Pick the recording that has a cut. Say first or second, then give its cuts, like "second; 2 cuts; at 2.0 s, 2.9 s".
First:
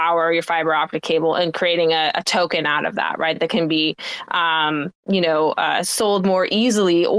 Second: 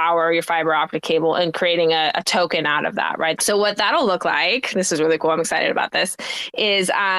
second; 1 cut; at 3.4 s